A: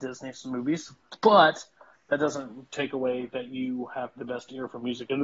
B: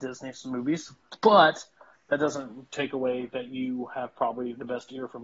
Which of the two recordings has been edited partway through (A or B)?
A